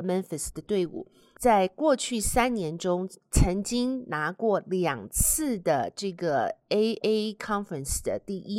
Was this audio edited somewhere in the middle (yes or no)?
yes